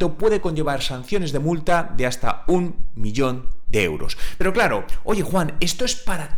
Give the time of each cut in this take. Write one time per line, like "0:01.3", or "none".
none